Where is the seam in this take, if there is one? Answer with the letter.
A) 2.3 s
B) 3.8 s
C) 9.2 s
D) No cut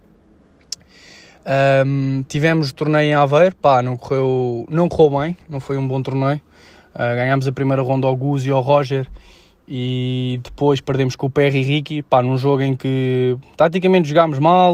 A